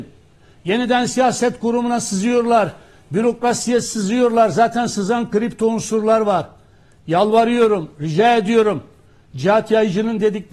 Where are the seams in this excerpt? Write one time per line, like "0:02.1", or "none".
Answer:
none